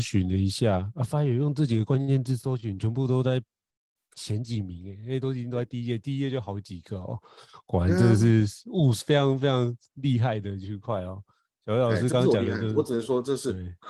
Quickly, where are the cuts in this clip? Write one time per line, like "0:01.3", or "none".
none